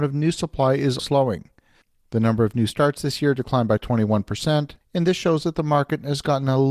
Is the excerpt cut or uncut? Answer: cut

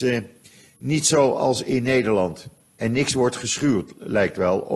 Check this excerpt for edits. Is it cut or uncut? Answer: cut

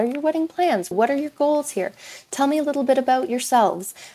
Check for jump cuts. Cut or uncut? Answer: cut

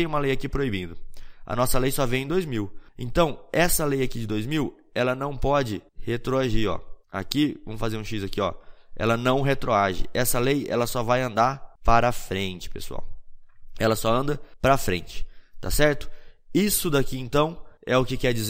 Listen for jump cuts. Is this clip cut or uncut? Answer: uncut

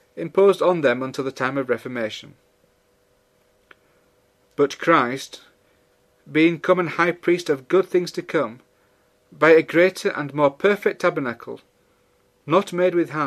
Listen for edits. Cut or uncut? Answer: uncut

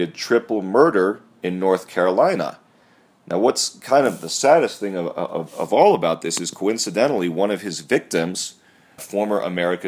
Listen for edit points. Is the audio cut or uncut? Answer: cut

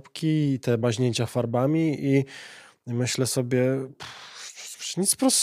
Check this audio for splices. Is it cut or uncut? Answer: uncut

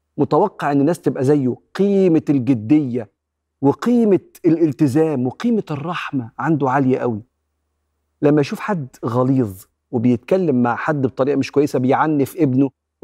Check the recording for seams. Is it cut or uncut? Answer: uncut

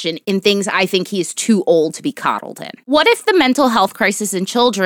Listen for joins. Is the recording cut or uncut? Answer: uncut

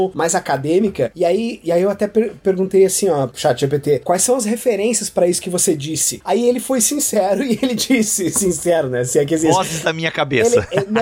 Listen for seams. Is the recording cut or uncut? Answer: uncut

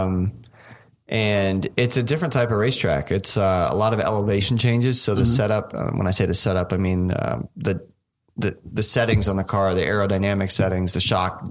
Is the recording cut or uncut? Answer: uncut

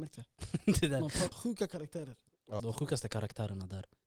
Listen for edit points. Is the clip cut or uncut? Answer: cut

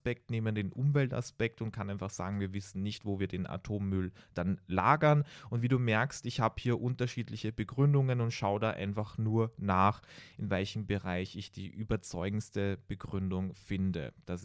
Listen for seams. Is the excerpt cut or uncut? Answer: uncut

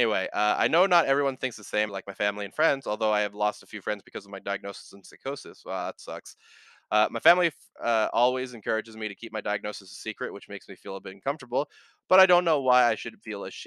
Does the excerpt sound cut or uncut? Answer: cut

